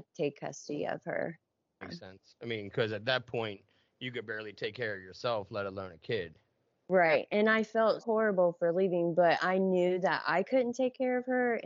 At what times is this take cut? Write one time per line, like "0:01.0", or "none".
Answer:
0:01.8
0:08.0

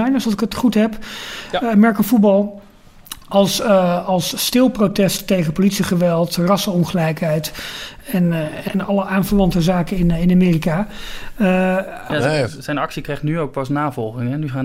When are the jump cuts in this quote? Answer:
0:08.7
0:12.1

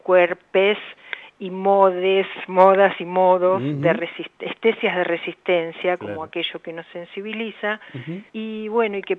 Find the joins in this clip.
0:08.3

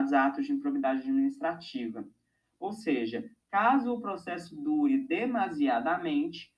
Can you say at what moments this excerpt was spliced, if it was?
0:02.5

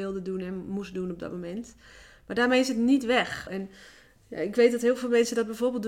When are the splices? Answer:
0:03.5

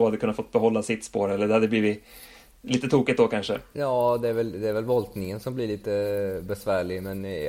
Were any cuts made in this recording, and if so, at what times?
none

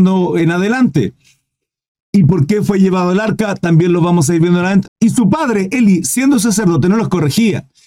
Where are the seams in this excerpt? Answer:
0:04.9

